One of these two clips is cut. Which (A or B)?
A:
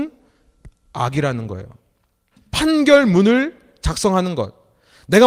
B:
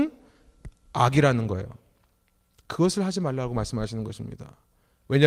A